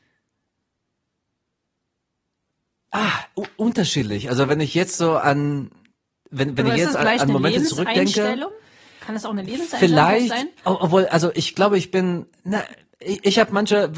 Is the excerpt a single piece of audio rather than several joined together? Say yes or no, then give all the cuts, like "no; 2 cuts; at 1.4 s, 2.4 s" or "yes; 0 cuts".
yes; 0 cuts